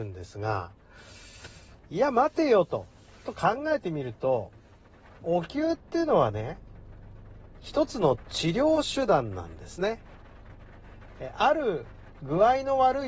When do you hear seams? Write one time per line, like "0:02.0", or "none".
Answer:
none